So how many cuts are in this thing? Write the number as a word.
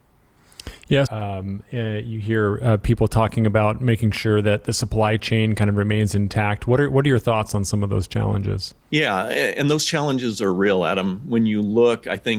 two